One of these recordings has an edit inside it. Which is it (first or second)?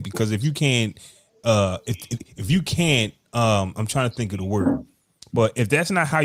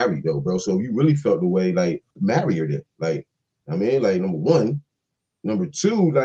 second